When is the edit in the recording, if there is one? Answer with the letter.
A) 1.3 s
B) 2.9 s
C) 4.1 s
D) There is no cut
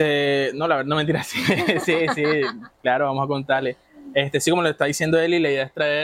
D